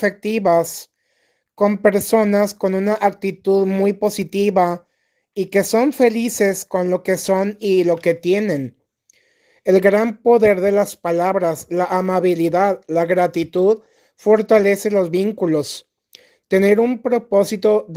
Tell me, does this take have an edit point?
no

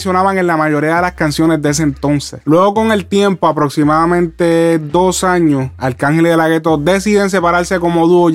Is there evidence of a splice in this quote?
no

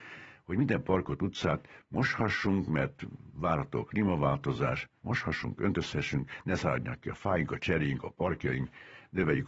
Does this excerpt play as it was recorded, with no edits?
yes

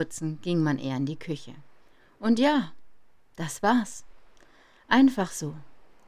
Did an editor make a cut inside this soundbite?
no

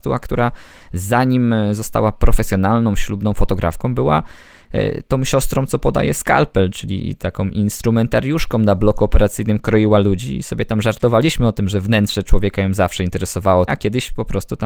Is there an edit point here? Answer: yes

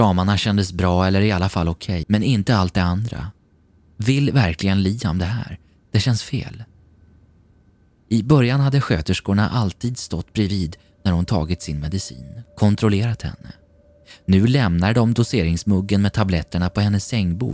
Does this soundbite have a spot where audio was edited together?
yes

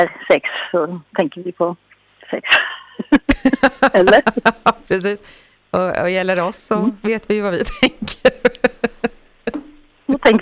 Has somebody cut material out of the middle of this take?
no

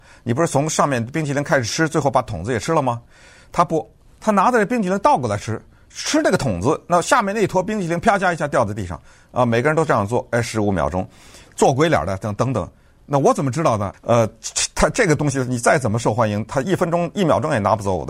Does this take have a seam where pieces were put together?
yes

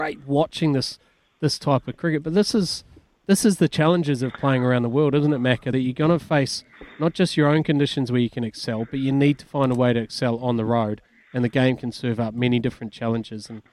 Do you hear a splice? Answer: no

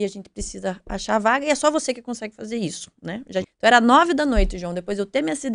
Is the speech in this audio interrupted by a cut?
yes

